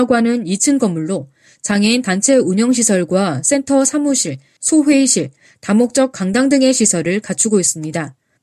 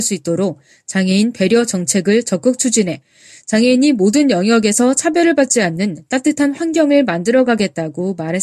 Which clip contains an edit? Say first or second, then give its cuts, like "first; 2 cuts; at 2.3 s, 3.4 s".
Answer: first; 1 cut; at 4.6 s